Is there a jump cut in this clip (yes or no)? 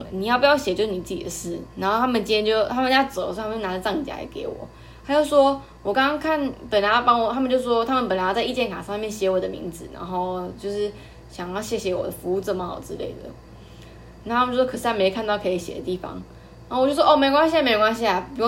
no